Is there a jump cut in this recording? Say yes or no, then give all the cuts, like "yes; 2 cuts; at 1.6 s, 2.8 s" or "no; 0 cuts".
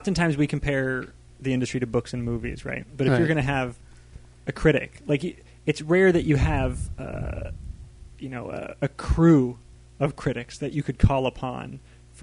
no; 0 cuts